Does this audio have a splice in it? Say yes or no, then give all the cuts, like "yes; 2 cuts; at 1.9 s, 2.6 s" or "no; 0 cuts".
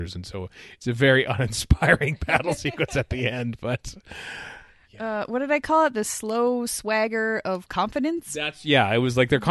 no; 0 cuts